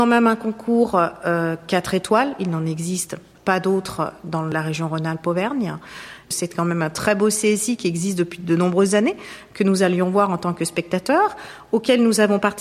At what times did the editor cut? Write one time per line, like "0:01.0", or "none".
0:03.4